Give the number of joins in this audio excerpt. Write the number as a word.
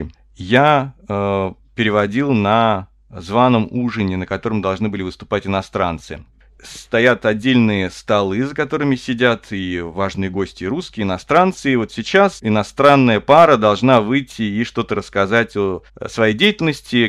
one